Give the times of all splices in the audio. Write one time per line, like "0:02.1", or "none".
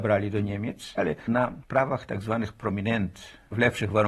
0:00.9